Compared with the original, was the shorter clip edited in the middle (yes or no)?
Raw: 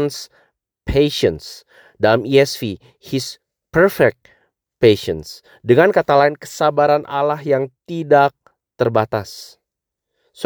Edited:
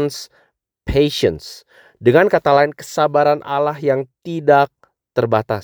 yes